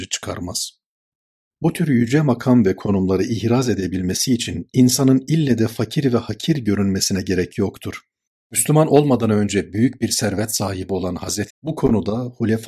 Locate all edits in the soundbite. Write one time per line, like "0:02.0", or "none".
0:01.5
0:08.4
0:11.5